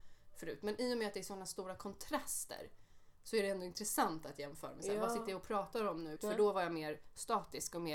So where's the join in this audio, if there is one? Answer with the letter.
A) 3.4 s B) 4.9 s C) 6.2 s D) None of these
C